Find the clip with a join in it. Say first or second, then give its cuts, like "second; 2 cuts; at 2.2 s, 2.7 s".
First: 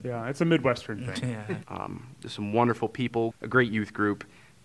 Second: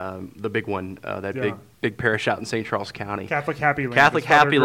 first; 2 cuts; at 1.6 s, 3.3 s